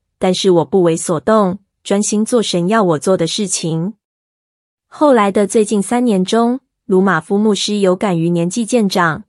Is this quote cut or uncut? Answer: uncut